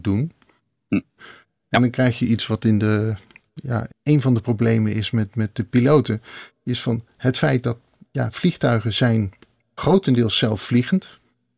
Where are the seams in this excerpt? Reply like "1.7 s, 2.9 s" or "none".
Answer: 1.2 s, 3.9 s